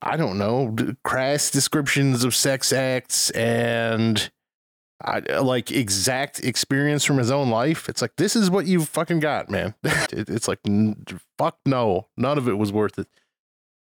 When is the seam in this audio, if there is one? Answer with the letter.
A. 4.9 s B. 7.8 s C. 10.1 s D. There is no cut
C